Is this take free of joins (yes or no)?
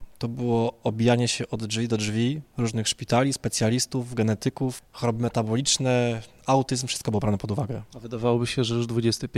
yes